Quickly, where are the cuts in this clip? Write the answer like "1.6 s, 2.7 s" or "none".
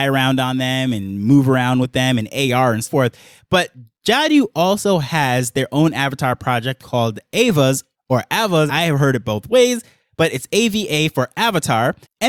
2.8 s, 8.7 s